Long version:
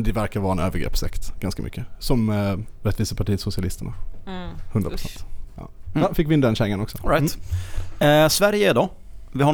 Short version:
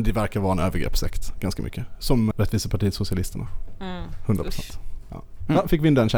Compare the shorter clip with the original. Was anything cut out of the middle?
yes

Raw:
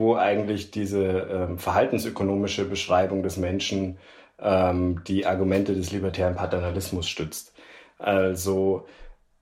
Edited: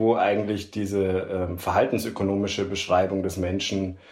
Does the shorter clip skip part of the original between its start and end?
no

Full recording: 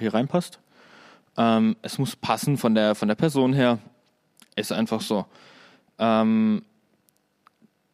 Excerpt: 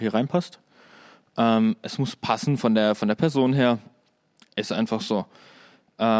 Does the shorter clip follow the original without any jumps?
yes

